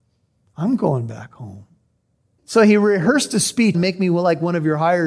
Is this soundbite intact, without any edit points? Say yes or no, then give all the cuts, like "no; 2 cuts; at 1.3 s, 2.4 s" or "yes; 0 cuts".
no; 2 cuts; at 2.4 s, 3.7 s